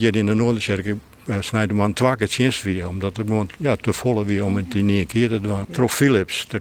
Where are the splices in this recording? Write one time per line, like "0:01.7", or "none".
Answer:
0:05.6